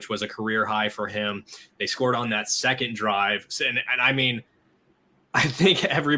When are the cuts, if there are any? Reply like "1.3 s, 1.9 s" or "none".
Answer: none